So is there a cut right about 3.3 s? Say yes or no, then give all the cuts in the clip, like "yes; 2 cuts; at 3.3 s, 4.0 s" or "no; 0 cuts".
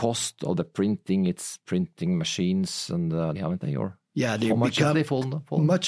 yes; 2 cuts; at 3.3 s, 4.9 s